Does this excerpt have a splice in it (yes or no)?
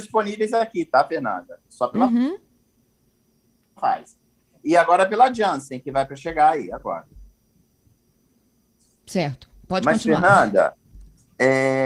no